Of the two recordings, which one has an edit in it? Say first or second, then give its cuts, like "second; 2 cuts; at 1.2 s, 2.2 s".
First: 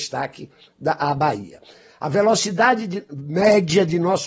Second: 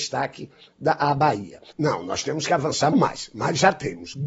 second; 2 cuts; at 1.7 s, 2.9 s